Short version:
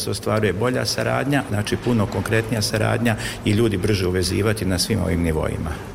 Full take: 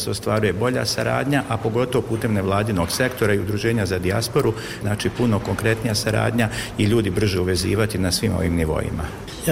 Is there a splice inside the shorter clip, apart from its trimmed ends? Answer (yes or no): yes